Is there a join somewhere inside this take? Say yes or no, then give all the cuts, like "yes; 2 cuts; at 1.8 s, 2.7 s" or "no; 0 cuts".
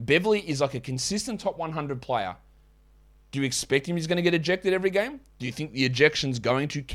no; 0 cuts